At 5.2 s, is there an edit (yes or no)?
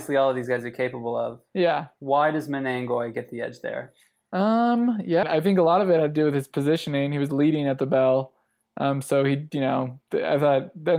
yes